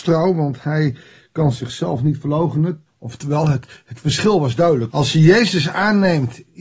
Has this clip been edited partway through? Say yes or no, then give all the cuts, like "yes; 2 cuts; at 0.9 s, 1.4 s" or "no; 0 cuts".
yes; 2 cuts; at 2.9 s, 4.9 s